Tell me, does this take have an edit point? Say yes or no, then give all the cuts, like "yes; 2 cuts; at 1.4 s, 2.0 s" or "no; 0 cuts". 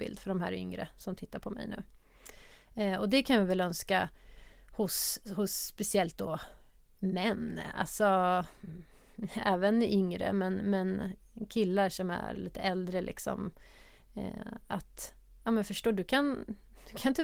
no; 0 cuts